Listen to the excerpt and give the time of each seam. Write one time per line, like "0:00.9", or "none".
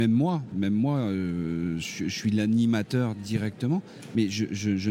none